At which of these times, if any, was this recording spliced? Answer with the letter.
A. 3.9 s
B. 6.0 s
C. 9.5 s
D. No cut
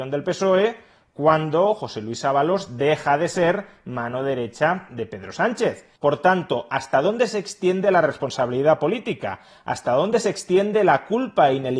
B